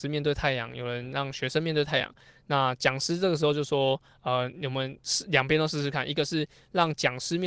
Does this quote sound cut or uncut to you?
uncut